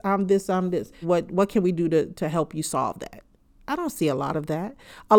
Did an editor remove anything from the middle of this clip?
yes; 1 cut; at 1.0 s

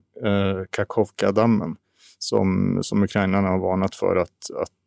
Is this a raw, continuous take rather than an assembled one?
yes; 0 cuts

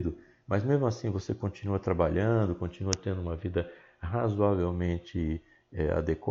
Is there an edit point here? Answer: no; 0 cuts

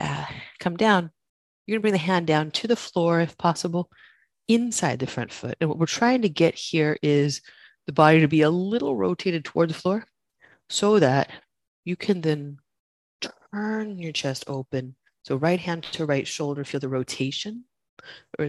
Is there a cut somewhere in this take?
no; 0 cuts

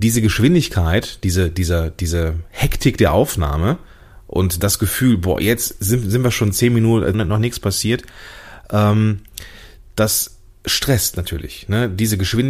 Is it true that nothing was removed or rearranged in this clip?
no; 1 cut; at 7.1 s

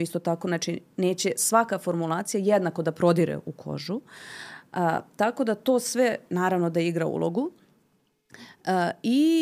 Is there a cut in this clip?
no; 0 cuts

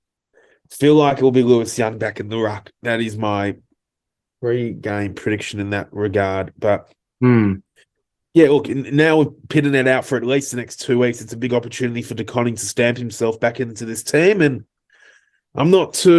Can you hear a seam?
no; 0 cuts

